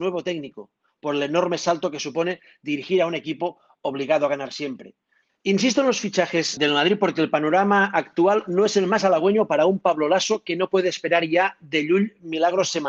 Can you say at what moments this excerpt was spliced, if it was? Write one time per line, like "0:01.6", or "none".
0:05.3
0:06.6